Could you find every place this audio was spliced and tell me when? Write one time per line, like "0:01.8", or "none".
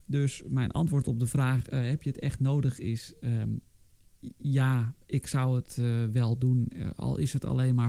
none